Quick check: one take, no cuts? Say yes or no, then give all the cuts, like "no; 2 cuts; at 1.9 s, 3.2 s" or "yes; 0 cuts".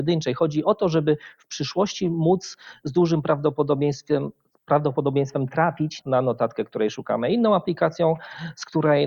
no; 1 cut; at 6.0 s